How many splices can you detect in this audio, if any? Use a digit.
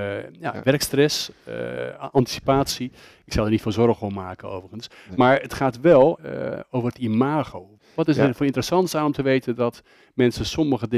2